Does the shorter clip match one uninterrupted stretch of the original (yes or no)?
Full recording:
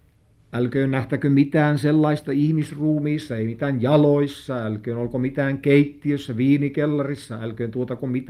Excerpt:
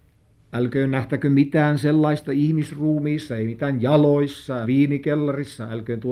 no